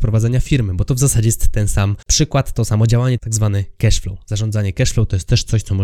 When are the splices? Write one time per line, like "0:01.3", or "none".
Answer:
0:02.0
0:03.2